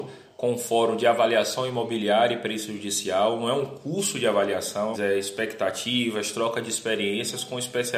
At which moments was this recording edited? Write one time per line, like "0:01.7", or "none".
0:04.9